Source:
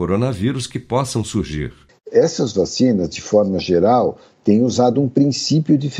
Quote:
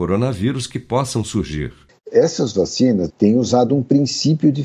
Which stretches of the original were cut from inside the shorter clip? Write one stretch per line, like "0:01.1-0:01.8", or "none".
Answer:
0:03.1-0:04.4